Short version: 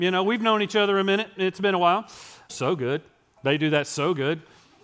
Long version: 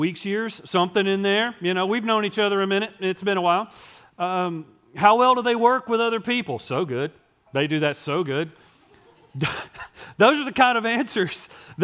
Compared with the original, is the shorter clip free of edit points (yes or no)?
no